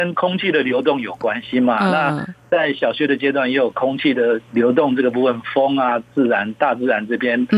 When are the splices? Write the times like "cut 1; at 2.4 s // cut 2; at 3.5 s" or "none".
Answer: none